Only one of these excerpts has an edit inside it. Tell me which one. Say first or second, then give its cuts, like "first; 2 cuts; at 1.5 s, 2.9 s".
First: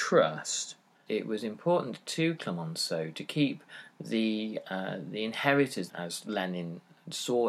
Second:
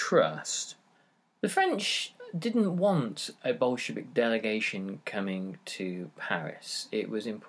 first; 2 cuts; at 1.1 s, 5.9 s